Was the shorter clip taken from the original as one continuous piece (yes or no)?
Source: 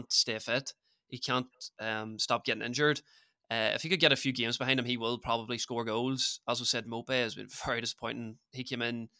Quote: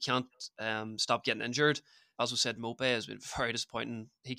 no